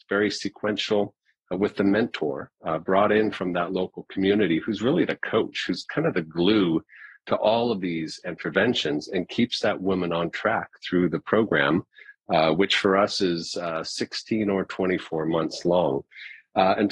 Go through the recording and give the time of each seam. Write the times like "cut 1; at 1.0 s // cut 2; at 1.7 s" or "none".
cut 1; at 2.5 s